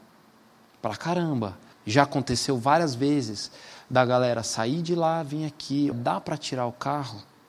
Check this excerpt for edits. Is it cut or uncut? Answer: cut